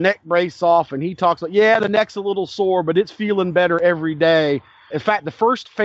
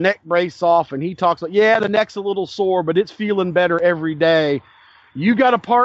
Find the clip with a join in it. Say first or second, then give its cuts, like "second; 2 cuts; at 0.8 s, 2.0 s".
first; 1 cut; at 4.9 s